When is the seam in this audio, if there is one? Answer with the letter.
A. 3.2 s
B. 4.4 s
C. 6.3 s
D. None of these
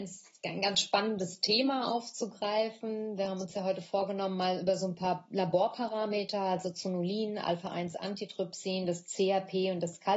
D